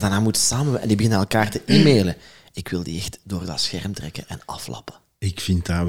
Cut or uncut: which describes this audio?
uncut